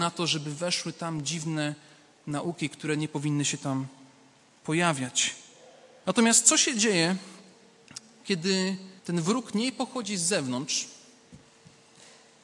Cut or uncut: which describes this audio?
cut